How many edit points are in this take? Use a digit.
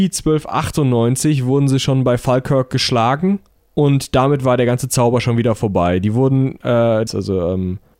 1